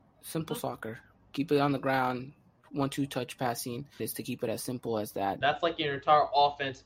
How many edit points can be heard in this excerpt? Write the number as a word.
two